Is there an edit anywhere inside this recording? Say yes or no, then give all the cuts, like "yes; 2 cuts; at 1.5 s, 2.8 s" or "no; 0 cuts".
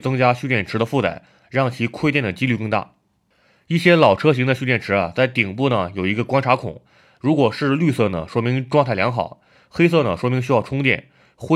no; 0 cuts